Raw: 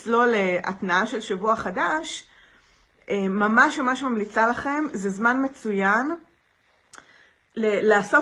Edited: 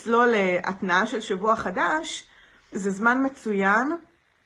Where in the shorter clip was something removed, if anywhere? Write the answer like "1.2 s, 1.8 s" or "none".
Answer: 2.7 s